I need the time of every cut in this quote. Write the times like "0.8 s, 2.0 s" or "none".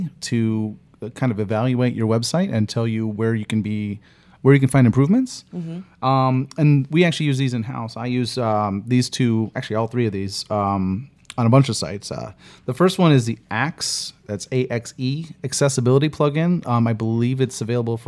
none